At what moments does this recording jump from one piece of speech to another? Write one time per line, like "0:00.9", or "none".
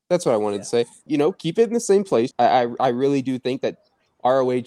0:01.1
0:02.3